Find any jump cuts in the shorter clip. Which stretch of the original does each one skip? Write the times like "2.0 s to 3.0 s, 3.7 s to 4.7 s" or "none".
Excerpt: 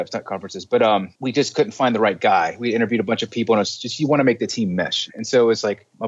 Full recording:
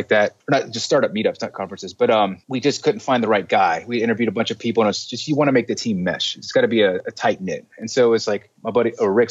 6.4 s to 7.7 s